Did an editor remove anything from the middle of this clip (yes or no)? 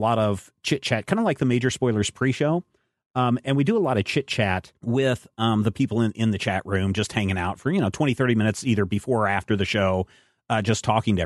yes